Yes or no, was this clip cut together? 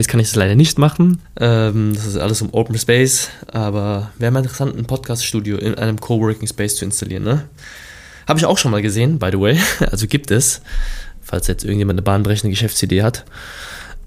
yes